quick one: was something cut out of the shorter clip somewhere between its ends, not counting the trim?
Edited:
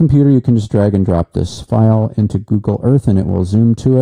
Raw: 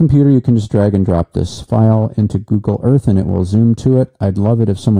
no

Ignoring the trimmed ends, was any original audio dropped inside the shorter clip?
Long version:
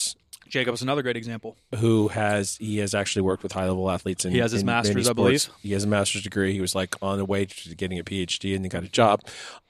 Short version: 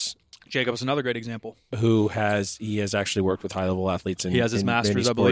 no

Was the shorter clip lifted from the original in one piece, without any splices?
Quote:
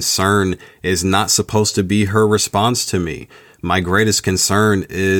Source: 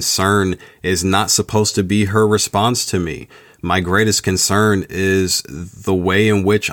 yes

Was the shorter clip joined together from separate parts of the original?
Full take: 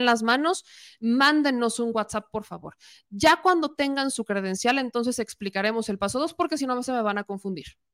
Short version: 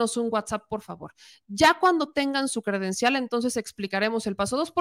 no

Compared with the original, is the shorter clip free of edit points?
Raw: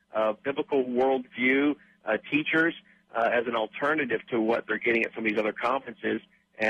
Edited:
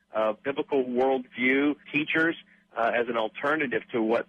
no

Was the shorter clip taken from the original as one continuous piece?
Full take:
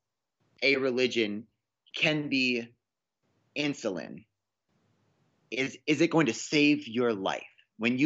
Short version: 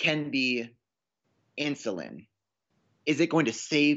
no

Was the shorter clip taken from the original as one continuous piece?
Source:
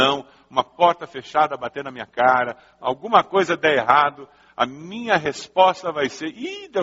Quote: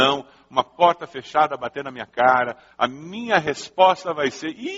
no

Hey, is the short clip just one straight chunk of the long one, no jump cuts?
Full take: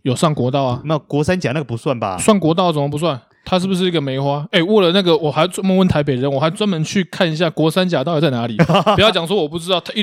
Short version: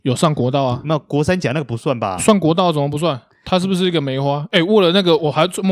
yes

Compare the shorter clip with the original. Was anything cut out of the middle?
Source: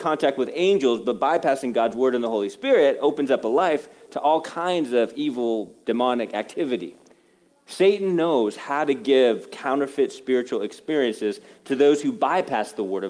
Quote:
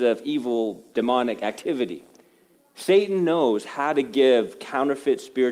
no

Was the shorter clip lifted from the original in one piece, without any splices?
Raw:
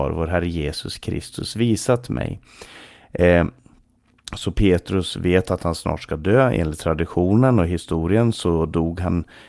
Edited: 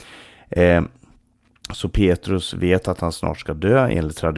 yes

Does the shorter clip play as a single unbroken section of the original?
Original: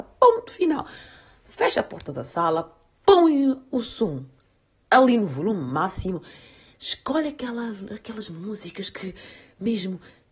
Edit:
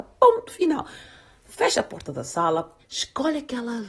no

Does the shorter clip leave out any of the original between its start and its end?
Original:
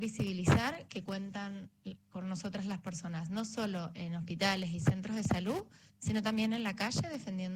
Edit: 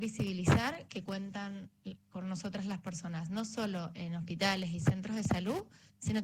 no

